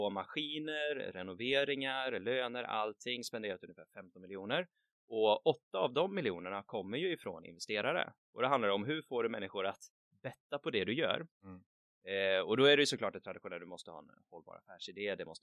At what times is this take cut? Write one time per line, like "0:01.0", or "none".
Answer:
none